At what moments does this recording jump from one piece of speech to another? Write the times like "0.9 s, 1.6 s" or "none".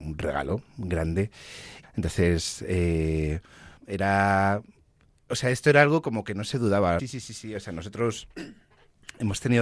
1.8 s, 3.8 s, 7.0 s